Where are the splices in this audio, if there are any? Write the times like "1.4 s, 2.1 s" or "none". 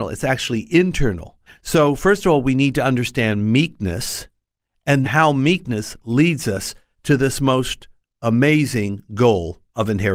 1.5 s, 5.0 s